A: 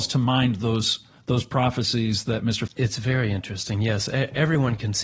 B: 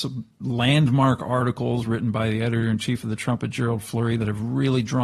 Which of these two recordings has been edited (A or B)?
A